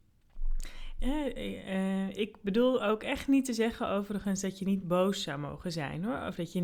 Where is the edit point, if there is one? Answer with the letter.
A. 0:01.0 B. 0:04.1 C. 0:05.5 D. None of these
A